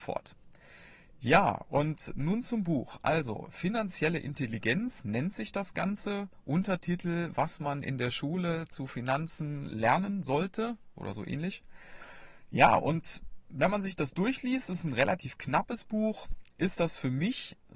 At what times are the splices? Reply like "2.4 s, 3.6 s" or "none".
none